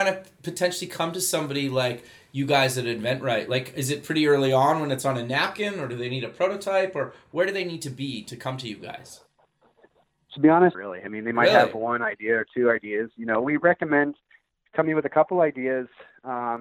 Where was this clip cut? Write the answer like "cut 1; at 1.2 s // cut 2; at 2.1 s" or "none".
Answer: cut 1; at 10.7 s